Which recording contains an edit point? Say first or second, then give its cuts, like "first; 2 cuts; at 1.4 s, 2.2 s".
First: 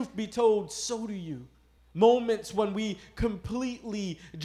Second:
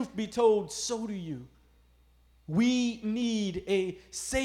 first; 1 cut; at 1.8 s